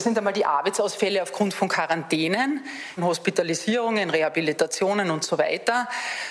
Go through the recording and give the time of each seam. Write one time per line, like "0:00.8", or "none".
0:03.0